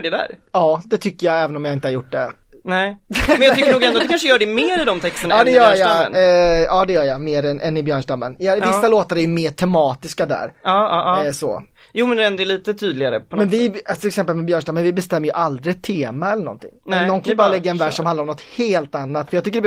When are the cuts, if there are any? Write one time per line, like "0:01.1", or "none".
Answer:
none